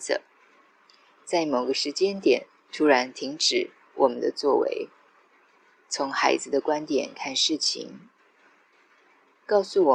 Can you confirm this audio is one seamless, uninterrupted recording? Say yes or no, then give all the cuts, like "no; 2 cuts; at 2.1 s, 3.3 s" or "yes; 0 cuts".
yes; 0 cuts